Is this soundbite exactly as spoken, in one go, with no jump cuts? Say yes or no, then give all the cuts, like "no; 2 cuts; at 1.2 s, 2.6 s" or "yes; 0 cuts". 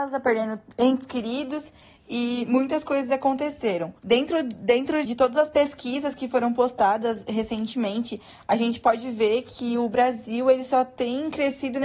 no; 2 cuts; at 4.0 s, 5.1 s